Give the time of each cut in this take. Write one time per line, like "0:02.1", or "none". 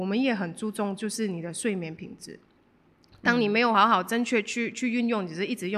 none